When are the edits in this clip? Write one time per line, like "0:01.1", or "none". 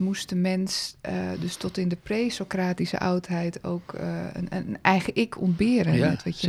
none